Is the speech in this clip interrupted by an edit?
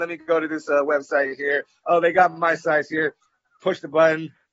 no; 0 cuts

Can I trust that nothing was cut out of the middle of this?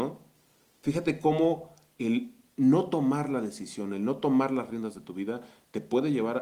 yes; 0 cuts

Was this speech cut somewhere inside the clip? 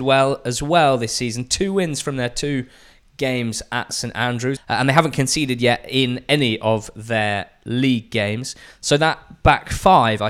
yes; 1 cut; at 4.6 s

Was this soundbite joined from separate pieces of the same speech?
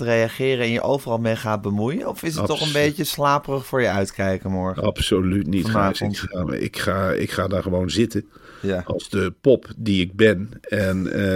no; 0 cuts

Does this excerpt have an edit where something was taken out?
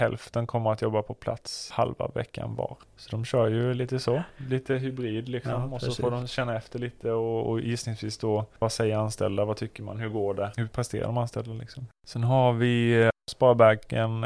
no; 0 cuts

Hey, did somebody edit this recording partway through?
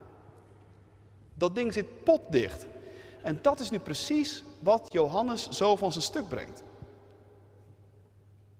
no; 0 cuts

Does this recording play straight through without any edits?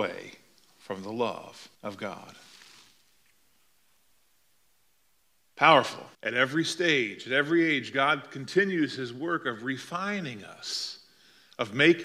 no; 2 cuts; at 1.7 s, 6.1 s

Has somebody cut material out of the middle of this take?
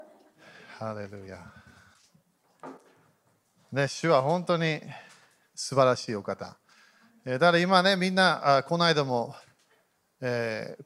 no; 0 cuts

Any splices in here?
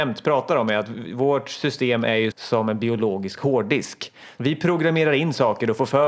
yes; 2 cuts; at 2.3 s, 4.4 s

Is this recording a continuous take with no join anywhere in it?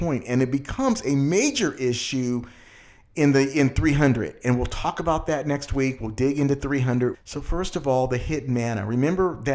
no; 1 cut; at 7.1 s

